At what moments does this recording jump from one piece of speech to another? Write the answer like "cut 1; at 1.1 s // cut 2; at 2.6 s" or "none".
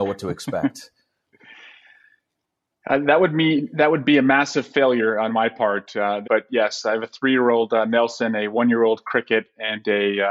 cut 1; at 6.2 s